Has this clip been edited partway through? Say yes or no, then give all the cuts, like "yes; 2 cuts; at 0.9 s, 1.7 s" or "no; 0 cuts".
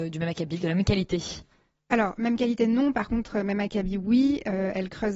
no; 0 cuts